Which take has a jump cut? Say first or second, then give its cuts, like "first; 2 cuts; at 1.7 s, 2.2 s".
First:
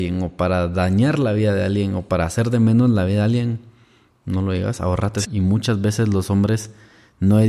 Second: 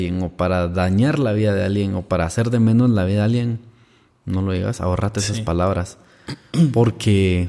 first; 1 cut; at 5.2 s